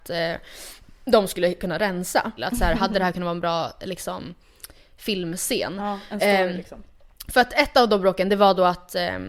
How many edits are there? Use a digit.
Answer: 1